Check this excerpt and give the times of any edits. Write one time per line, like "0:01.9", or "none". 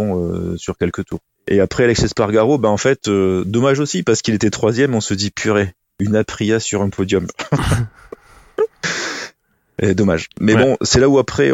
0:01.3